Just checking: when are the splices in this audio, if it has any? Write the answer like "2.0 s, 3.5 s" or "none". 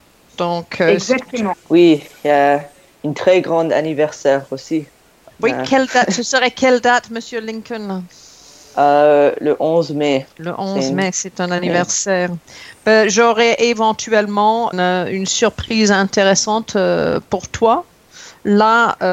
1.5 s, 10.3 s, 14.7 s